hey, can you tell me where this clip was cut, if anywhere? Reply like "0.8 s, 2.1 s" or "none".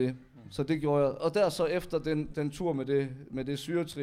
2.3 s